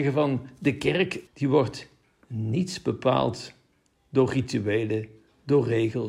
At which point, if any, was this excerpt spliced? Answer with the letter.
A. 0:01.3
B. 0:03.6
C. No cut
A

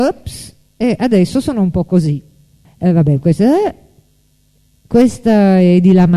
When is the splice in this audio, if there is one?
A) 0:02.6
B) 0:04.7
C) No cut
A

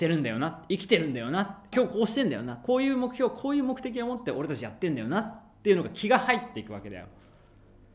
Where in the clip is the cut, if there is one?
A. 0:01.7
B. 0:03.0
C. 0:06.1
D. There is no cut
A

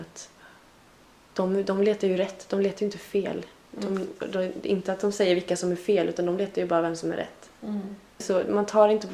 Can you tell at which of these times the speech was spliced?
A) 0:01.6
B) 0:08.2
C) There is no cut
B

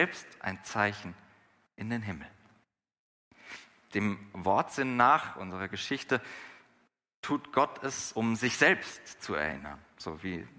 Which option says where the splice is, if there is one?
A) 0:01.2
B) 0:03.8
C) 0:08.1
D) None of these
D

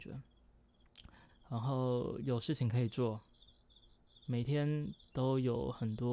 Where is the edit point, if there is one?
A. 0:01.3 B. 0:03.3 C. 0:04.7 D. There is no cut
A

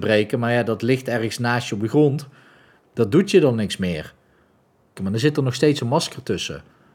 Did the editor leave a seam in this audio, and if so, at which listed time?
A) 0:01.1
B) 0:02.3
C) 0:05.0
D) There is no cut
C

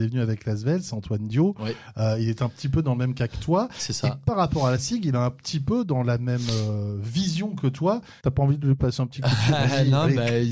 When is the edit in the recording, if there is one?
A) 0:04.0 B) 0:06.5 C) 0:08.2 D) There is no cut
C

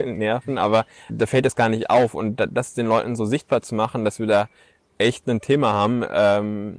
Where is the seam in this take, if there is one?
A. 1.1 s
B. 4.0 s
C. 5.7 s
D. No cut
A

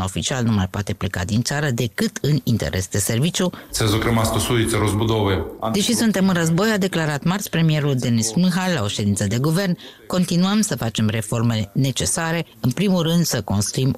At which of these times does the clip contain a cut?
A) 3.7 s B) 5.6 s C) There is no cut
A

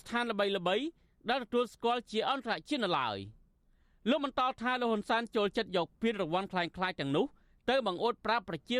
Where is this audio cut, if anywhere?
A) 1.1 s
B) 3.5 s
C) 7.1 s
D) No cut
D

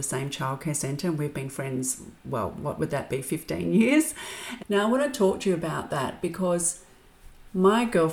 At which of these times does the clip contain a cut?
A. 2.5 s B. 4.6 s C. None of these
B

